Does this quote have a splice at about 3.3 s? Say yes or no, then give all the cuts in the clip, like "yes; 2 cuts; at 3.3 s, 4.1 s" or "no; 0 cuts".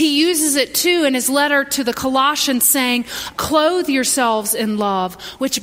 yes; 1 cut; at 3.3 s